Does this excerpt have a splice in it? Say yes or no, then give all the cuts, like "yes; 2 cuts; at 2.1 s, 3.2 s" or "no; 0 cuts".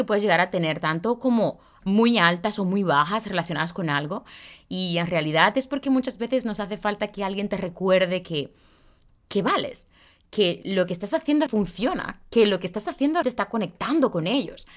yes; 2 cuts; at 11.5 s, 13.2 s